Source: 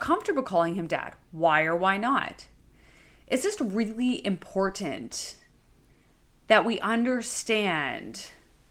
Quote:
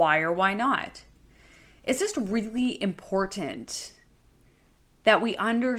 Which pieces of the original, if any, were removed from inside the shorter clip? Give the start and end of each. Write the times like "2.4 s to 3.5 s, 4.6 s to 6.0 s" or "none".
none